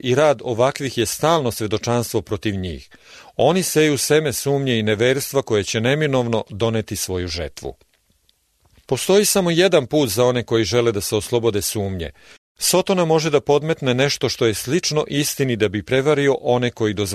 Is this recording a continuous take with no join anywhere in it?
no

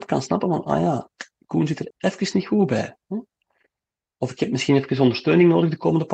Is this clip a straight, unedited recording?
no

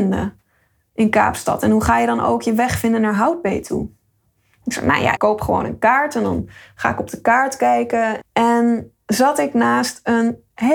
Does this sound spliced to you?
yes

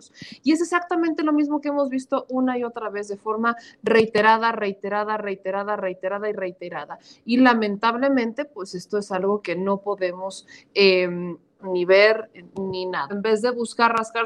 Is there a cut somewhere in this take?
yes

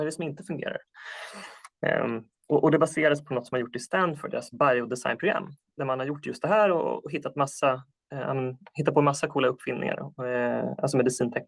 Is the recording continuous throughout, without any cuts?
yes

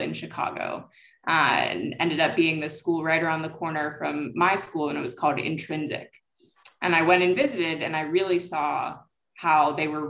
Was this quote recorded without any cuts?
yes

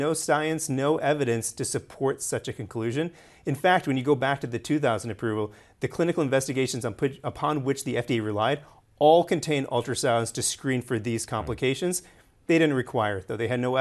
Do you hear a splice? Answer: no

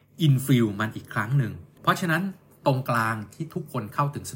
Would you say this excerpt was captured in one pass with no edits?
no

